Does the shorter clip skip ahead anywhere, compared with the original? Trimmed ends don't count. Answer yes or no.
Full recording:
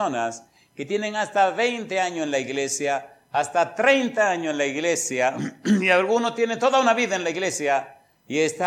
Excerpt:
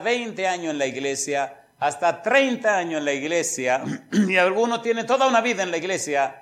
no